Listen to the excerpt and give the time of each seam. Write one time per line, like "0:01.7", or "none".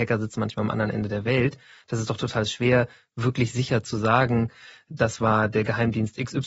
none